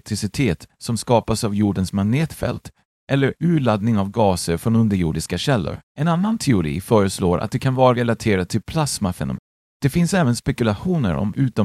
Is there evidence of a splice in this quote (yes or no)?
yes